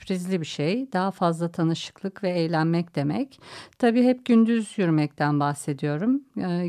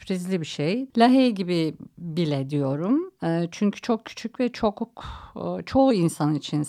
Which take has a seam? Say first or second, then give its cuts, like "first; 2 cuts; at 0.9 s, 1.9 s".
second; 1 cut; at 0.9 s